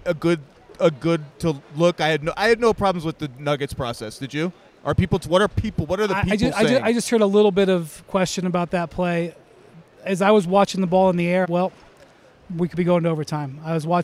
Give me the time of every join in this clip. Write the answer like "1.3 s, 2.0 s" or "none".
11.4 s